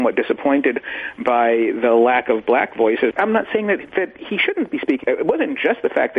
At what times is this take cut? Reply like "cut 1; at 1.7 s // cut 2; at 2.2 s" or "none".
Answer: cut 1; at 3.1 s // cut 2; at 5.0 s